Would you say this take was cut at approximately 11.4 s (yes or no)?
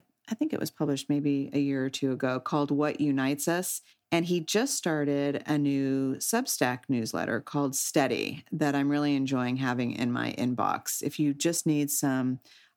no